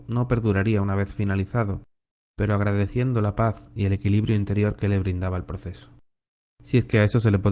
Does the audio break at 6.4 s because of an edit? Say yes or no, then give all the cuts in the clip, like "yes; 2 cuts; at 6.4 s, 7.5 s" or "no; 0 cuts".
yes; 1 cut; at 6.4 s